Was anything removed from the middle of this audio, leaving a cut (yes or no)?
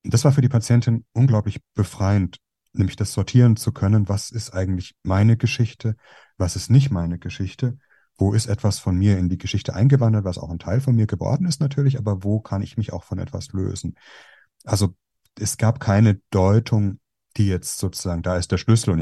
no